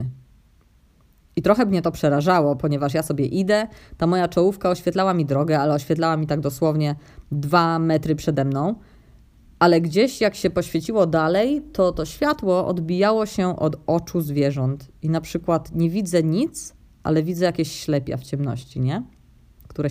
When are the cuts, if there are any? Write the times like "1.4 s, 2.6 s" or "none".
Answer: none